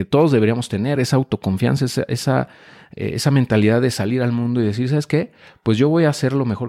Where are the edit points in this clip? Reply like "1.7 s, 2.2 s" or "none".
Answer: none